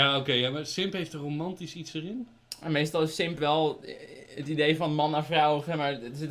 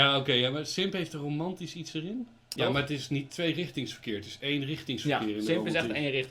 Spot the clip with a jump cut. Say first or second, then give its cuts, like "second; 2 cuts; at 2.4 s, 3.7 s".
second; 1 cut; at 2.6 s